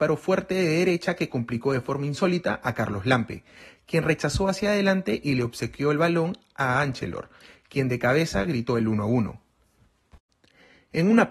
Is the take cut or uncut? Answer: uncut